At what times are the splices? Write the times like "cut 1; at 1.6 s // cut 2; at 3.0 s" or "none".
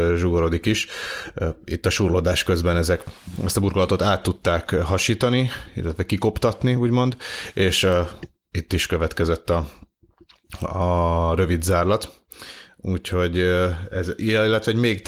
none